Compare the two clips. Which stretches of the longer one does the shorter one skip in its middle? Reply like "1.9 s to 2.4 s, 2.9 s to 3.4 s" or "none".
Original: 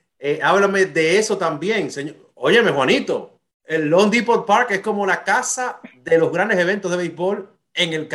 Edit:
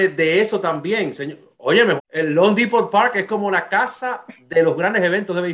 2.7 s to 3.5 s